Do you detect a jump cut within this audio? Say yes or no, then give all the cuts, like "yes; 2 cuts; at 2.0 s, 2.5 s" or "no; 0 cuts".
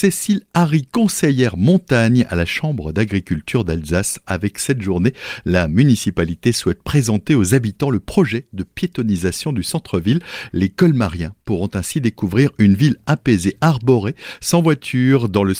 yes; 1 cut; at 4.2 s